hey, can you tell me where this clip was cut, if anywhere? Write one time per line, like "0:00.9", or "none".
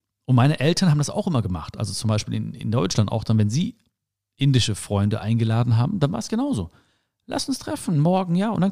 none